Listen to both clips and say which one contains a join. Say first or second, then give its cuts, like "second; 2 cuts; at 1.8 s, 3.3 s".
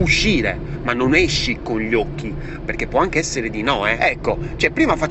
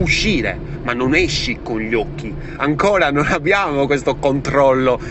first; 2 cuts; at 2.6 s, 4.0 s